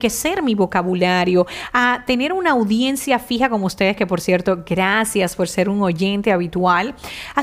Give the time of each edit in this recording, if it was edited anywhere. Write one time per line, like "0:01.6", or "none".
none